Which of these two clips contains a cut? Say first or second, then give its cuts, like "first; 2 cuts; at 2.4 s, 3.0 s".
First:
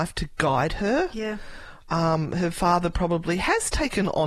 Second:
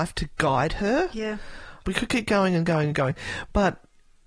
second; 1 cut; at 1.8 s